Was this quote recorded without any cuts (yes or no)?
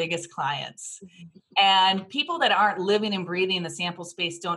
yes